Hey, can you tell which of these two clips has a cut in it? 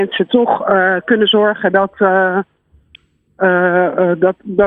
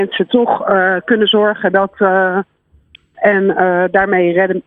second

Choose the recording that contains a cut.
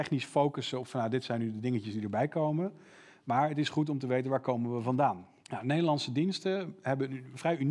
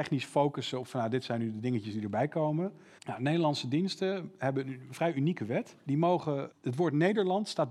second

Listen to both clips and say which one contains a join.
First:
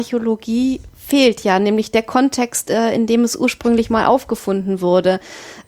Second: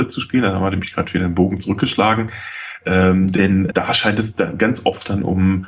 second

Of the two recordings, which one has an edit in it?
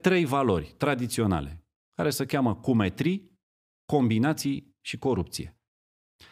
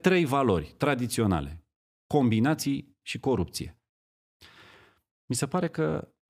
second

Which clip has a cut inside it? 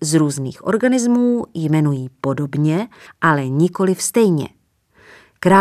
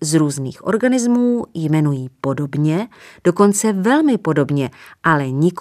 first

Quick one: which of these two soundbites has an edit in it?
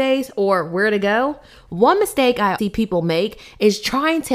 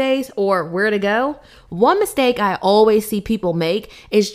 first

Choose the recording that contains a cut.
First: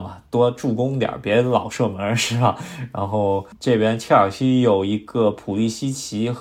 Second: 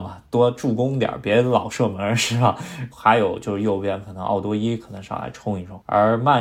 second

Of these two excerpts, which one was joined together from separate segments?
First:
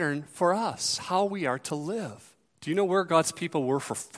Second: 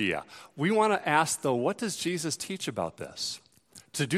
first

